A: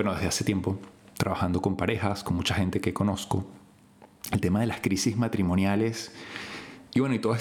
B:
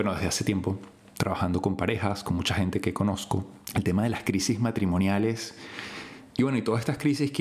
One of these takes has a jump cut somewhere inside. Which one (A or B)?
B